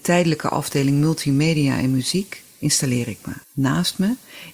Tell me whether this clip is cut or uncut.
cut